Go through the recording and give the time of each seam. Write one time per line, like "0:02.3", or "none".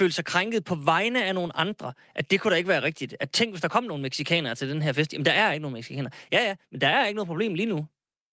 0:06.3

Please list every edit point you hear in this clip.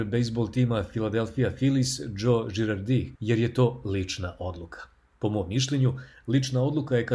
0:03.2

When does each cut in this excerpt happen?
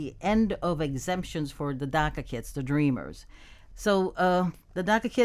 0:03.7

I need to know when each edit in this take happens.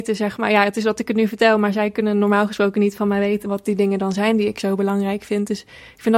0:03.4

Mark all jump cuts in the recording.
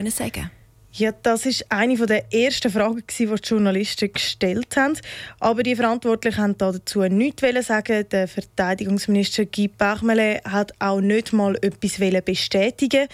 none

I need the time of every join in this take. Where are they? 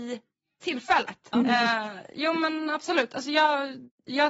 0:01.3

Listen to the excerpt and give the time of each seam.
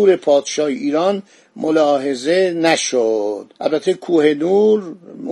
0:03.6

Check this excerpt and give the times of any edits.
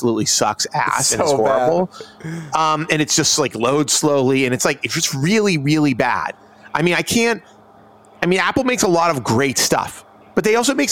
none

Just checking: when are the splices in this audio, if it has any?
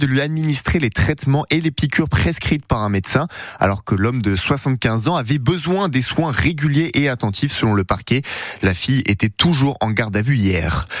none

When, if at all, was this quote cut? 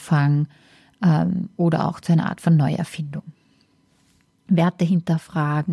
none

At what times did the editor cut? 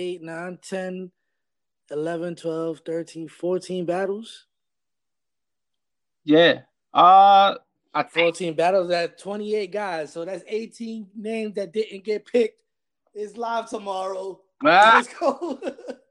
none

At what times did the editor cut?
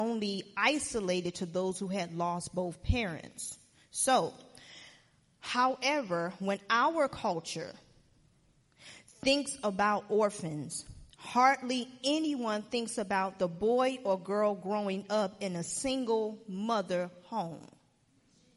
none

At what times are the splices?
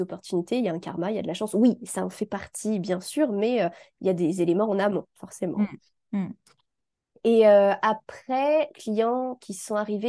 0:07.1
0:08.7

